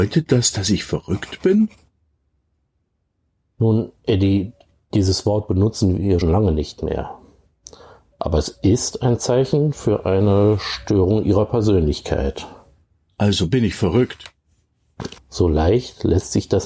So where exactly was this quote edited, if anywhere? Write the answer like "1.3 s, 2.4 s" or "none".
6.2 s, 15.2 s